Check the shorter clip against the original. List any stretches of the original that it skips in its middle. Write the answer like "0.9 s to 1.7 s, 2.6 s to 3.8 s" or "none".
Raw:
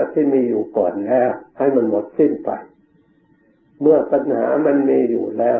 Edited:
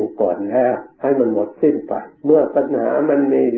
2.7 s to 3.7 s